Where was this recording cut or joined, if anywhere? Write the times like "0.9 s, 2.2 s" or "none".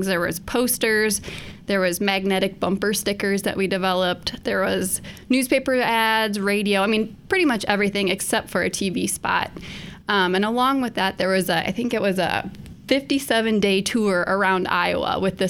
4.4 s